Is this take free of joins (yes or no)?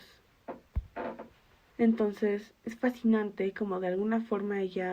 no